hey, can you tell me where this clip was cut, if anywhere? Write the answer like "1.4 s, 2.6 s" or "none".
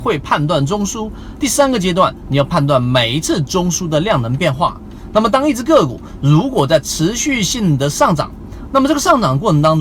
5.1 s